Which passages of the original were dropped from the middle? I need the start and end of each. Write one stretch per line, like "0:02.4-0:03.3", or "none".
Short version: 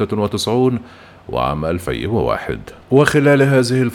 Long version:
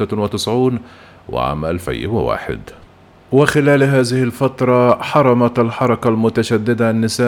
0:02.8-0:03.2